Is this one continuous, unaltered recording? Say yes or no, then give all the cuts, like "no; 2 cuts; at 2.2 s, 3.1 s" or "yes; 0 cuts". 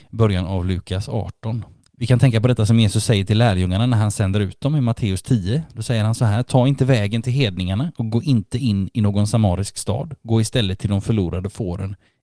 no; 1 cut; at 1.9 s